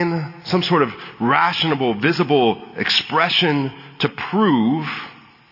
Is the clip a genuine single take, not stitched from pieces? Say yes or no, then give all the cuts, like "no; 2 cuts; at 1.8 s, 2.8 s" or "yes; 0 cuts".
yes; 0 cuts